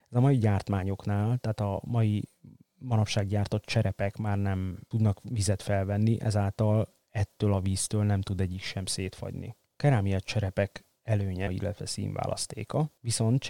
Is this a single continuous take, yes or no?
no